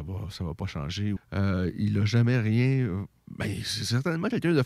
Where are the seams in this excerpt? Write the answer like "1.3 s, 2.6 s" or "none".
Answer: 1.2 s